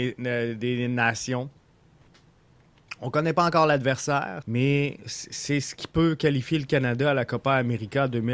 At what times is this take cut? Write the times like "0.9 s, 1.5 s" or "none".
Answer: 4.4 s